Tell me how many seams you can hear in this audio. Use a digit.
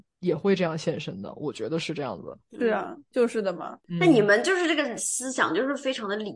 0